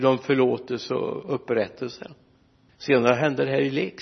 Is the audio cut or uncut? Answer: cut